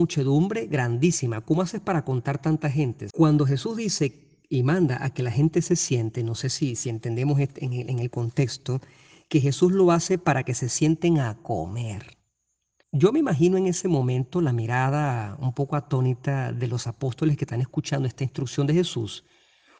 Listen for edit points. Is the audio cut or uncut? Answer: cut